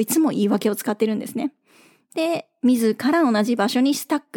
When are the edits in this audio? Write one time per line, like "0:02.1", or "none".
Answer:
none